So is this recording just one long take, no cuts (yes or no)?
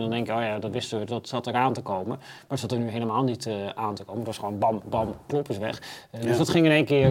no